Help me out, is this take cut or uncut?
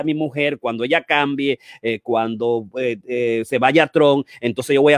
uncut